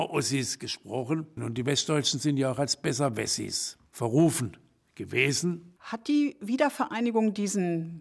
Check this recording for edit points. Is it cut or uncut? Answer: cut